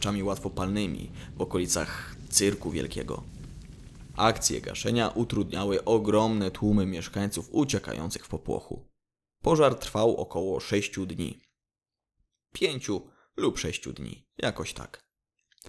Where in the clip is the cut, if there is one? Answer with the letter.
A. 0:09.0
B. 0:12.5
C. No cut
C